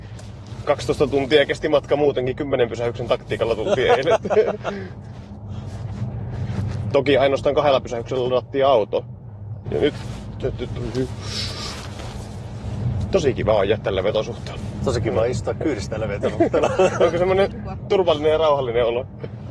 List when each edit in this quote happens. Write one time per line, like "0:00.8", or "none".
0:09.6

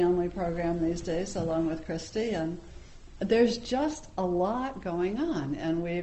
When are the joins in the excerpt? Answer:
0:03.2

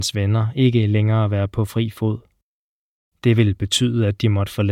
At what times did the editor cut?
0:03.1

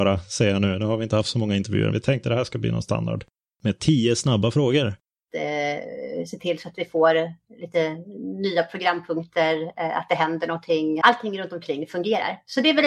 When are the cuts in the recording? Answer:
0:01.9
0:05.3
0:11.0

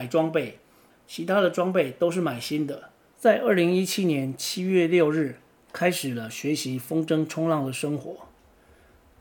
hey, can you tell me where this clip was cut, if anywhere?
0:00.9
0:03.1

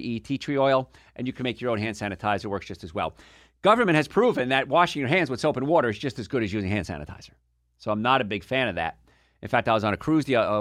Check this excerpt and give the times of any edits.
none

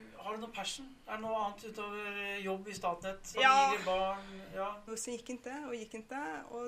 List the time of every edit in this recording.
0:03.3
0:04.9

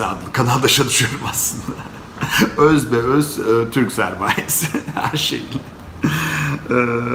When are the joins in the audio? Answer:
none

